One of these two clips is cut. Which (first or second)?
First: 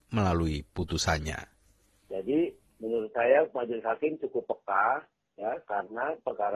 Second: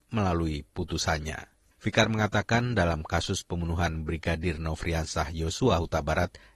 second